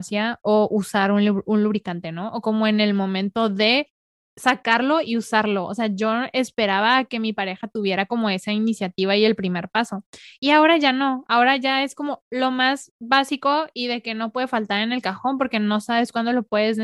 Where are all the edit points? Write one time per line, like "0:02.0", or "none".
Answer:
none